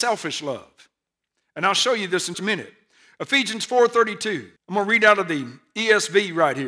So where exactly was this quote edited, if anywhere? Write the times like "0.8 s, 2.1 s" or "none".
2.3 s, 4.6 s